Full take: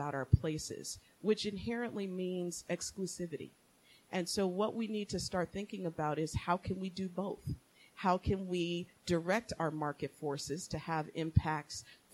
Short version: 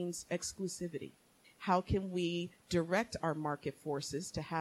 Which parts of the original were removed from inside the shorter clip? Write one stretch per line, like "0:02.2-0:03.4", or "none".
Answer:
0:03.8-0:07.8

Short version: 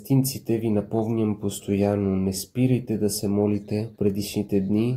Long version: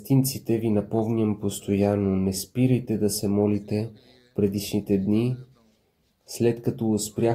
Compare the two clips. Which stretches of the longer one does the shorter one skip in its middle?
0:03.9-0:04.3

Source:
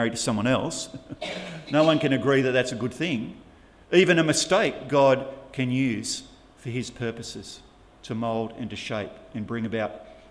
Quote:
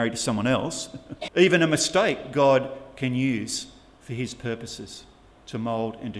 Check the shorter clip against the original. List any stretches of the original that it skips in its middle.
0:01.3-0:03.8

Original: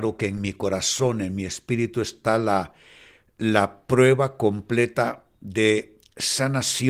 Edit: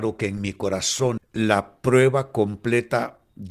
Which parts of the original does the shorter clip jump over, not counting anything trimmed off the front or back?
0:01.2-0:03.2

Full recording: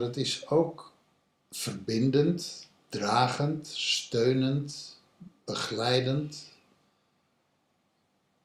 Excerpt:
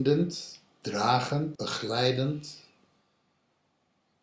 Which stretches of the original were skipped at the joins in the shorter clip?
0:03.6-0:05.4

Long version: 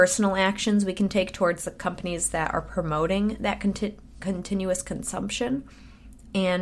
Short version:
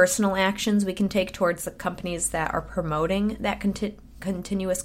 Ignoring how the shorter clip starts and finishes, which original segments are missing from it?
none

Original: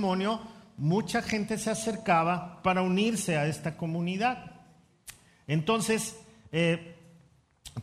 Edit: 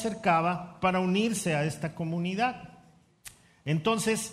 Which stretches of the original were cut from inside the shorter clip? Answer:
none

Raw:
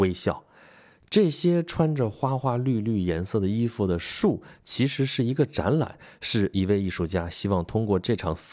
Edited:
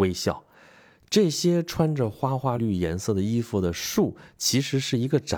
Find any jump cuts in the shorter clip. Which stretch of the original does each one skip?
0:02.6-0:02.8

